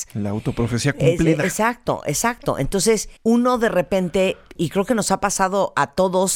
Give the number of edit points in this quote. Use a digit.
2